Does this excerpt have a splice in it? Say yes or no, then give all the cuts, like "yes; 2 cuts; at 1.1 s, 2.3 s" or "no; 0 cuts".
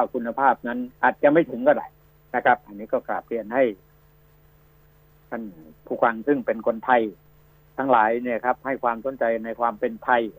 yes; 1 cut; at 0.9 s